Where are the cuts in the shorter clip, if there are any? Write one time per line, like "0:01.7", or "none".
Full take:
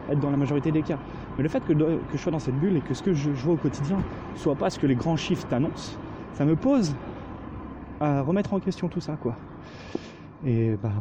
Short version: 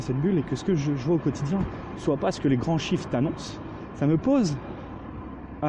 none